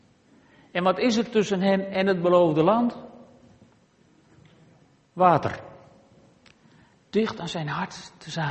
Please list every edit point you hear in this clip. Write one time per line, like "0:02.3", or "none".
0:06.9